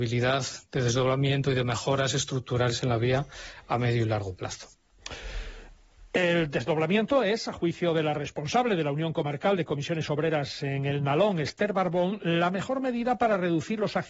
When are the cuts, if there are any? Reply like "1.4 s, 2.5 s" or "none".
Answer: none